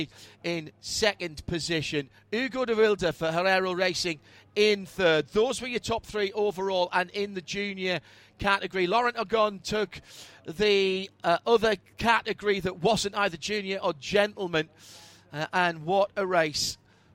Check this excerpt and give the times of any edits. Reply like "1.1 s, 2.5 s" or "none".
none